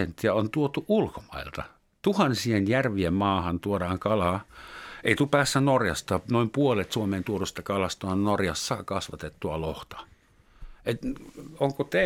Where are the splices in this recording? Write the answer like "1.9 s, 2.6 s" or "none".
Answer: none